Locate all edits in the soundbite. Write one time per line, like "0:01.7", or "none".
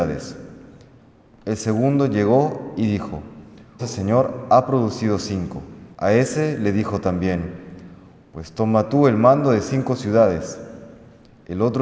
0:03.8
0:05.9